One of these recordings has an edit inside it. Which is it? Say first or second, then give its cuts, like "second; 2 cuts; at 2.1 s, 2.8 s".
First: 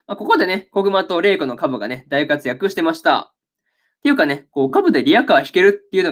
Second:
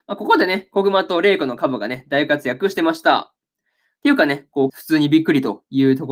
second; 1 cut; at 4.7 s